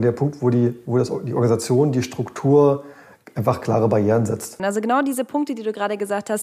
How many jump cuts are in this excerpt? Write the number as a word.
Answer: one